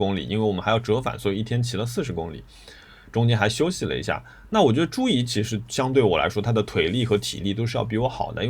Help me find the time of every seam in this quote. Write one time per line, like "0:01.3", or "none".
none

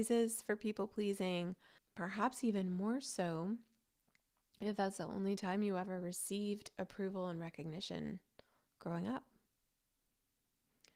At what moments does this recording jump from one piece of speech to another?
0:01.8

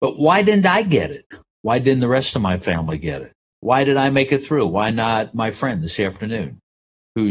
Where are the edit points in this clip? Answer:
0:03.5

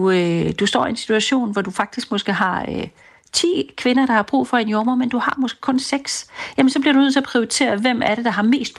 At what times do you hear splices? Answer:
none

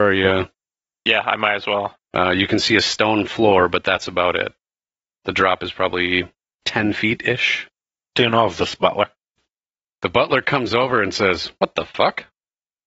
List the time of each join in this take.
0:02.0

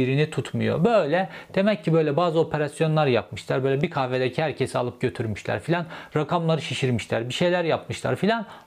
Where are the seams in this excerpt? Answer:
none

